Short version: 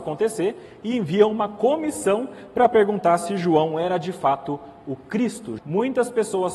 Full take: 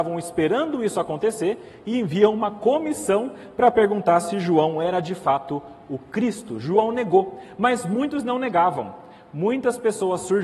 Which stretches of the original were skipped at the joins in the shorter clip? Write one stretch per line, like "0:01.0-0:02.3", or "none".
0:06.6-0:09.3